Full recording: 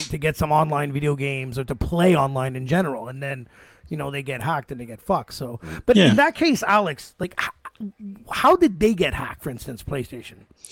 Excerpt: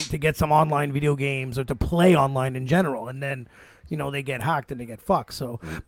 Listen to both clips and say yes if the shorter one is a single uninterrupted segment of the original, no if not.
yes